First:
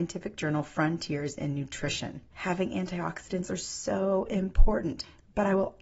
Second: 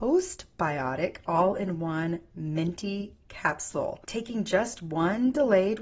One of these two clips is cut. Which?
first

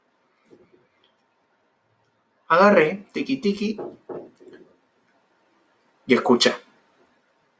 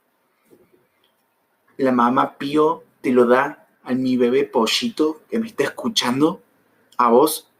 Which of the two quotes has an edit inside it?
second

